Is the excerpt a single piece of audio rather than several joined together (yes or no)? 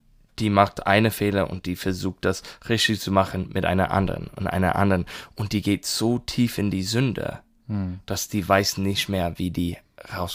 yes